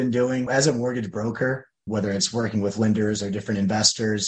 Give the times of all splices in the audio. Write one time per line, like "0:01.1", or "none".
0:01.9